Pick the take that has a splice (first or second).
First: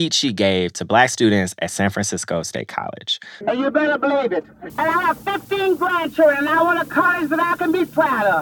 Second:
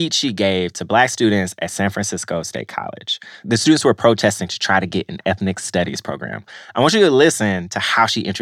first